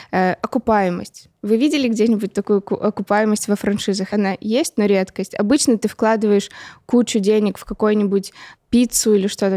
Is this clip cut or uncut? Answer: cut